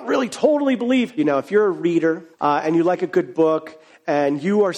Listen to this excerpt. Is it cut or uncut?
cut